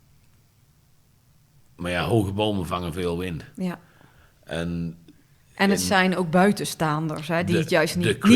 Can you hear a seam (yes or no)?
no